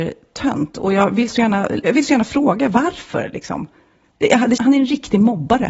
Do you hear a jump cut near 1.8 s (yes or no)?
yes